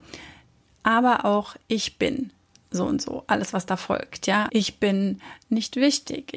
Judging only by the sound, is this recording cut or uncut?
cut